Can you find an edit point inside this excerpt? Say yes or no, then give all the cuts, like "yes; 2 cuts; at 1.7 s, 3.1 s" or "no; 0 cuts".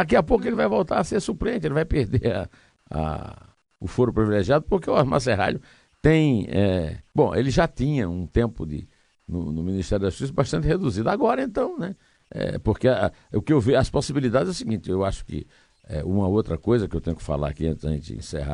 no; 0 cuts